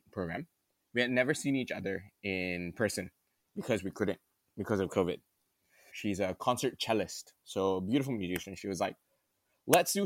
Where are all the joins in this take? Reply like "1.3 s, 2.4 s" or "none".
5.9 s